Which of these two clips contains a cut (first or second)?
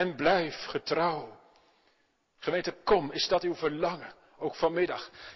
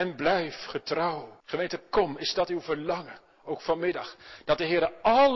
second